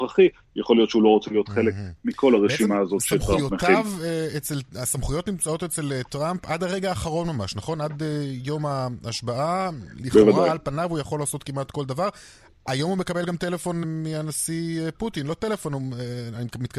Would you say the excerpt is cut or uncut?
cut